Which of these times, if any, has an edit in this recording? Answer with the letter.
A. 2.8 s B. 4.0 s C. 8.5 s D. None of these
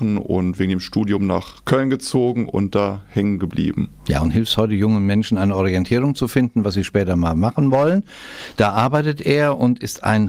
D